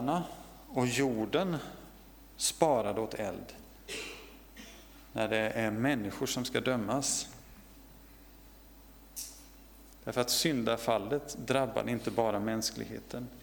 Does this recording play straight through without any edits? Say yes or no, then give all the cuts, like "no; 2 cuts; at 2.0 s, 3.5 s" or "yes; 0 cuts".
no; 1 cut; at 9.9 s